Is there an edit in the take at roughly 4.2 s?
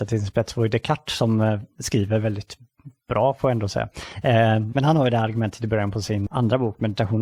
no; 1 cut; at 6.3 s

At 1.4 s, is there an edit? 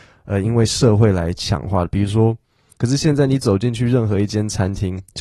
no; 1 cut; at 2.8 s

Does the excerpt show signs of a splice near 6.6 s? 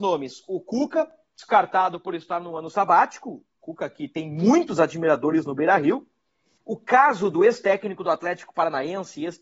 yes; 1 cut; at 6.6 s

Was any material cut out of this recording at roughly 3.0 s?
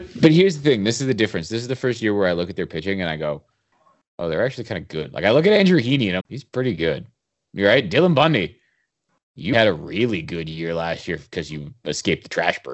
no; 2 cuts; at 6.2 s, 9.5 s

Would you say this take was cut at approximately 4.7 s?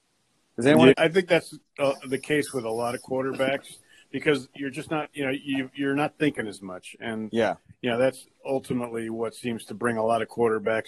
no; 1 cut; at 0.9 s

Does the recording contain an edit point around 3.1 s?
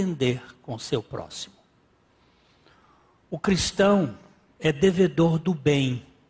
no; 0 cuts

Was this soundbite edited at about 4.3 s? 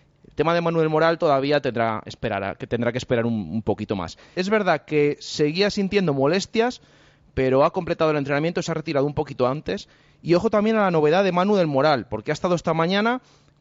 yes; 1 cut; at 4.3 s

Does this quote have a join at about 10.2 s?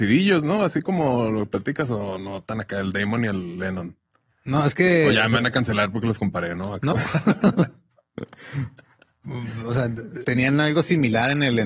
yes; 2 cuts; at 6.9 s, 10.2 s

